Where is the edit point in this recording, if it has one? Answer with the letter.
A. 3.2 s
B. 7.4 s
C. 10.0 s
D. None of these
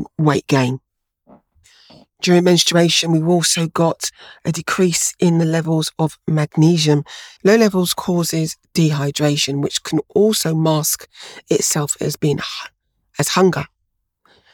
B